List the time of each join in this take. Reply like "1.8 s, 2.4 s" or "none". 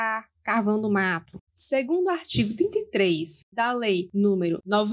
1.5 s